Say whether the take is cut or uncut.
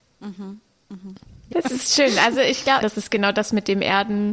cut